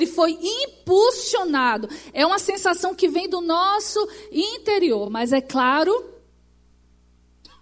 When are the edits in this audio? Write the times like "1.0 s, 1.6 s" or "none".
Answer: none